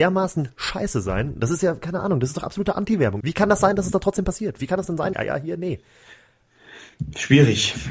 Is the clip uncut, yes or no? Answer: no